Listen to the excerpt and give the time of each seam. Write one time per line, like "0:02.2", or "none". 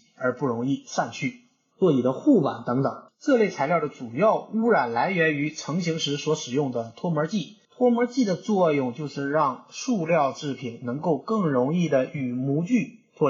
0:01.7